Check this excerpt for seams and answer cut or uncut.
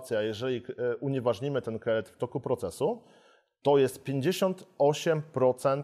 uncut